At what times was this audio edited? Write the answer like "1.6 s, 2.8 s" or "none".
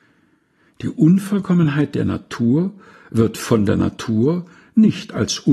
none